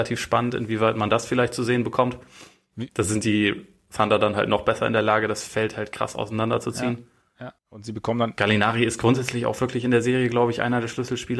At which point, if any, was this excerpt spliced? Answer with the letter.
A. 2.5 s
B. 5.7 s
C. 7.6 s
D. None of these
C